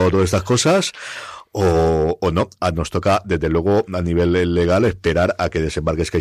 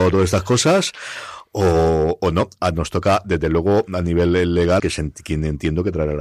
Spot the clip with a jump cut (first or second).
second